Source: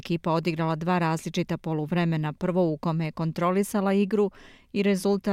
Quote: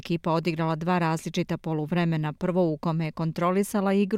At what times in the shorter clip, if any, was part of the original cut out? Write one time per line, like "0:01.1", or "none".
none